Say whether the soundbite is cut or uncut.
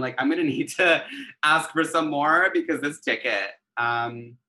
uncut